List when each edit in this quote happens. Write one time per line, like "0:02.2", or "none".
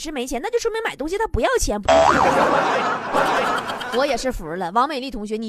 0:01.8
0:03.1